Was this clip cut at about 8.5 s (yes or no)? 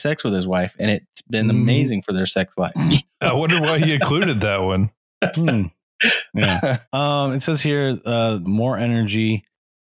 yes